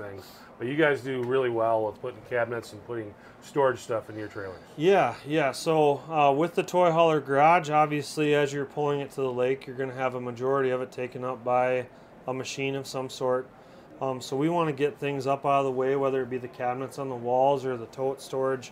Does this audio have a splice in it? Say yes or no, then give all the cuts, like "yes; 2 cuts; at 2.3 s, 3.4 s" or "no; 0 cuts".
no; 0 cuts